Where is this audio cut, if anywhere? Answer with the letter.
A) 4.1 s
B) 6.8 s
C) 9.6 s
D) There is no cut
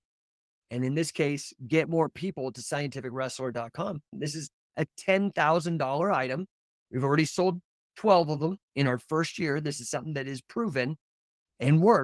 A